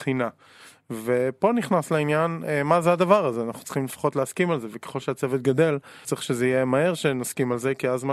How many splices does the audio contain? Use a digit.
1